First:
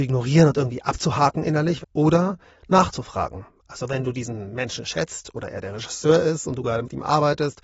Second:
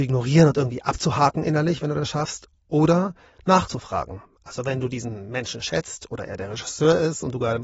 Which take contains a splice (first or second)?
first